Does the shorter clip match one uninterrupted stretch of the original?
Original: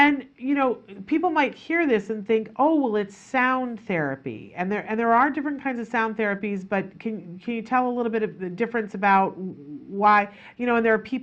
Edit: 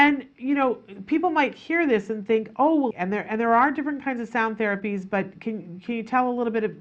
no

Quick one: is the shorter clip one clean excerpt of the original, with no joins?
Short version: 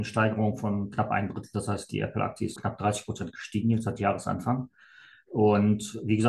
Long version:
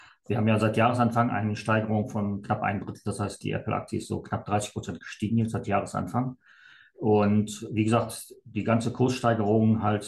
no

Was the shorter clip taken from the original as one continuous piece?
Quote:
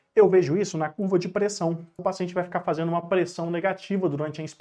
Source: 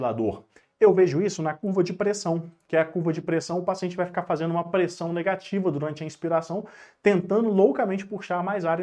no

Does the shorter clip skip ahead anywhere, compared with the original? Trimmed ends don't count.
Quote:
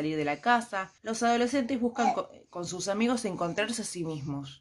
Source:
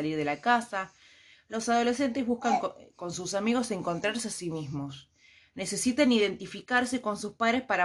yes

